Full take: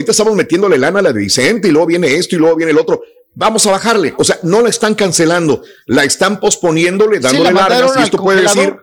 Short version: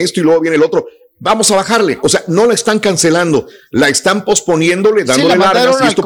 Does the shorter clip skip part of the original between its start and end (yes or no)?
no